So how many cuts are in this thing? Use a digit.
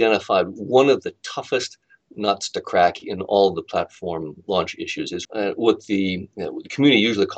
1